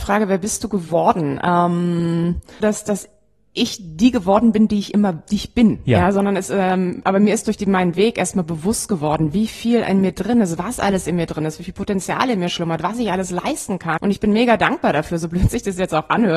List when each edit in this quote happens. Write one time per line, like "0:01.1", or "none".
0:02.6
0:14.0